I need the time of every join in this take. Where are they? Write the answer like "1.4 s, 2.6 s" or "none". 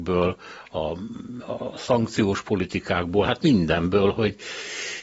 none